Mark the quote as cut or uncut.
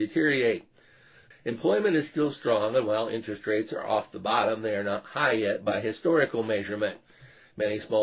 cut